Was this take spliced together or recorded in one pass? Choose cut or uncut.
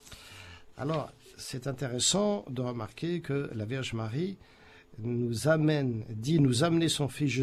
uncut